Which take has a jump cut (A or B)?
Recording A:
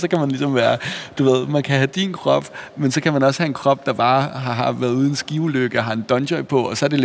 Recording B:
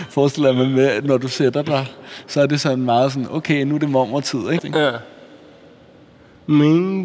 B